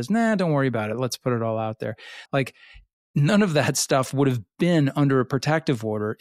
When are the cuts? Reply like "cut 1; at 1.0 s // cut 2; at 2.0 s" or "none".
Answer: cut 1; at 2.2 s